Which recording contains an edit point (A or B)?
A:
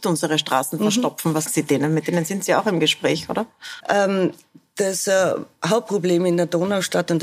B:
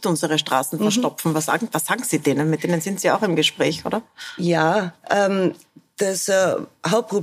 A